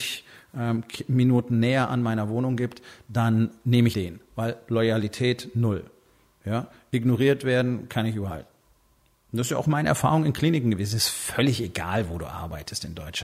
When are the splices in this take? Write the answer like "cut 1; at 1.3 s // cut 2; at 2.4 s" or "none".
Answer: cut 1; at 3.9 s